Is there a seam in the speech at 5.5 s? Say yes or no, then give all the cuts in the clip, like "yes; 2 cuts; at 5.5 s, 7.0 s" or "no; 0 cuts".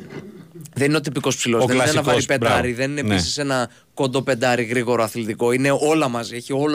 no; 0 cuts